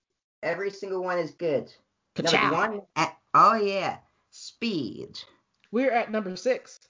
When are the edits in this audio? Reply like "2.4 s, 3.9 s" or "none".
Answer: 2.9 s, 5.6 s